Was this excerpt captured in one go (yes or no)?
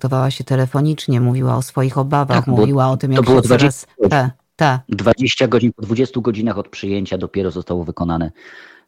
yes